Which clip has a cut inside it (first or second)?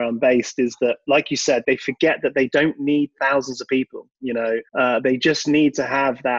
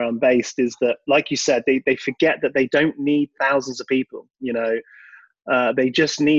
first